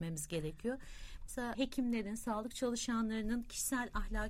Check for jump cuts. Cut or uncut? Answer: cut